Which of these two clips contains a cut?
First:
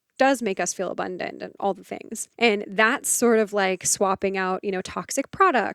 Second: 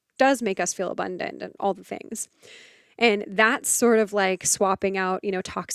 first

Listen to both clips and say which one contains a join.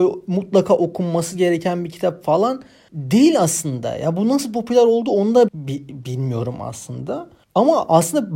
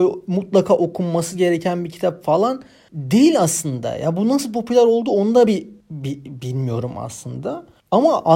first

